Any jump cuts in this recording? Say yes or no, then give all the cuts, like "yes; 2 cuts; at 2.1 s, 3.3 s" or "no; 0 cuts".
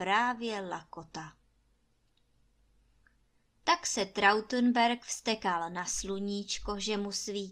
no; 0 cuts